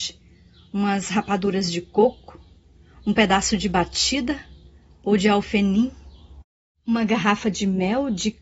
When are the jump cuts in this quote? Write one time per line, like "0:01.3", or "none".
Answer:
none